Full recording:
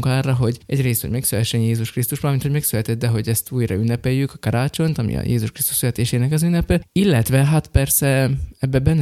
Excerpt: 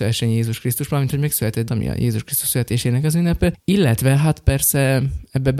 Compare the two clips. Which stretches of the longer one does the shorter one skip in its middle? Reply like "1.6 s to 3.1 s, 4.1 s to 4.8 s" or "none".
3.0 s to 5.0 s